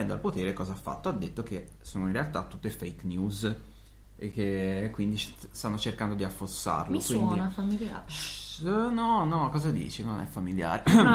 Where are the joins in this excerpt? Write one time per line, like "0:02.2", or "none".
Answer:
none